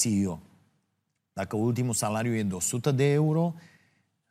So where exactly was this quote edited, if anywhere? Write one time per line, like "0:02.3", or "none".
none

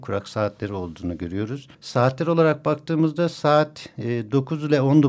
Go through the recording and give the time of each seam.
0:01.7

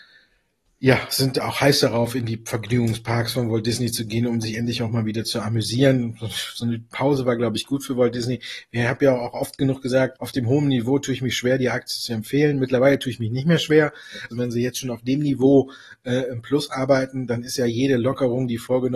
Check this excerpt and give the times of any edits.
0:10.2
0:14.3

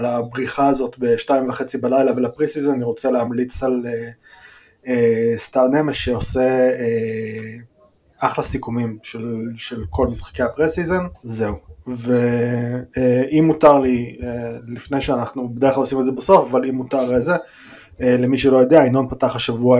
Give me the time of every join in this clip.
0:11.1

